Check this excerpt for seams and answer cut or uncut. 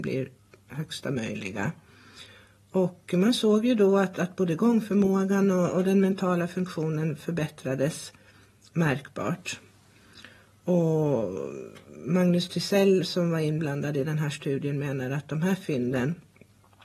uncut